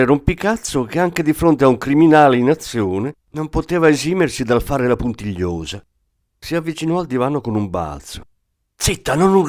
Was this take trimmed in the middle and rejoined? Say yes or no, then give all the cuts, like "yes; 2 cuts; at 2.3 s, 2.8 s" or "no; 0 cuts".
yes; 1 cut; at 6.2 s